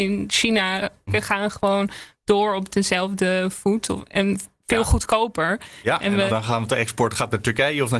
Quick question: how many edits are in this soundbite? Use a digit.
2